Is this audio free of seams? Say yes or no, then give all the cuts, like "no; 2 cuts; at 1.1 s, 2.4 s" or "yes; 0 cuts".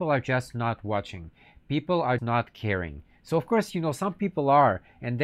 no; 1 cut; at 2.2 s